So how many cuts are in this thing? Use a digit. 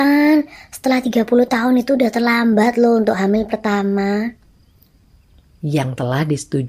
1